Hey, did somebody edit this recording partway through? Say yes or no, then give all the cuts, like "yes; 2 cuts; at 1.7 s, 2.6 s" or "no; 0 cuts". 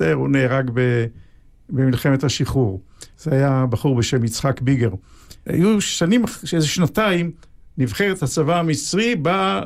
yes; 2 cuts; at 3.1 s, 5.5 s